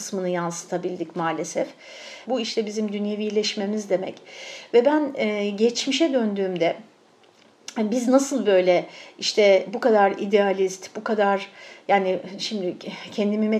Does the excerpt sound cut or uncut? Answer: cut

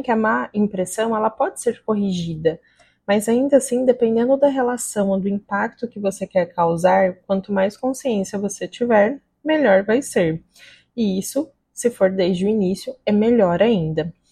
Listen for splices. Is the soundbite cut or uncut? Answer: uncut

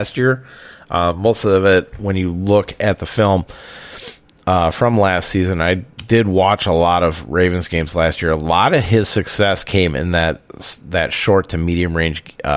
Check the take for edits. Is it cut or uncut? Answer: uncut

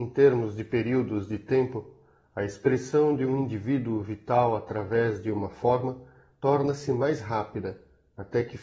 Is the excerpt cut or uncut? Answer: uncut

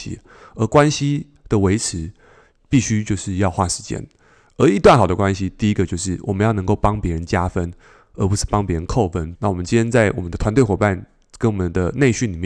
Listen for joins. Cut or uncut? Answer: cut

